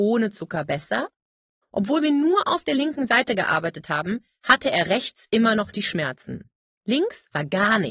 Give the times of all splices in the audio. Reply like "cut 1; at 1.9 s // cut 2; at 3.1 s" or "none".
cut 1; at 1.6 s

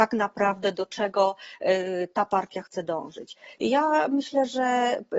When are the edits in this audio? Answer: cut 1; at 3.6 s

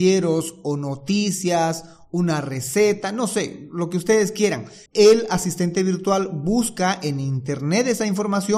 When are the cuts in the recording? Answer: cut 1; at 4.9 s

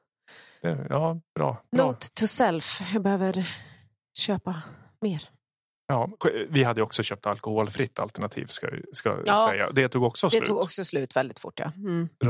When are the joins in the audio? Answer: none

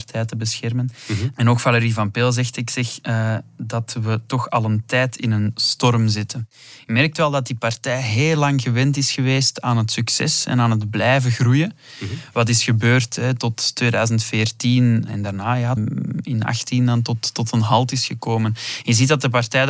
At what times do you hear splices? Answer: cut 1; at 15.8 s

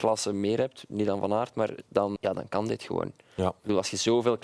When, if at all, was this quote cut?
cut 1; at 2.2 s

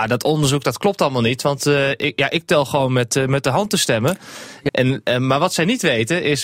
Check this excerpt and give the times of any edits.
cut 1; at 4.7 s

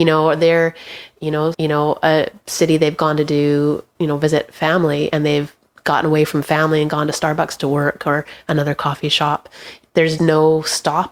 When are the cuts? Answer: cut 1; at 1.5 s // cut 2; at 10.2 s

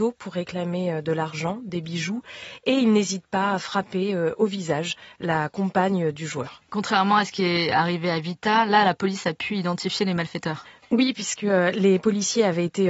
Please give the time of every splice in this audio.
none

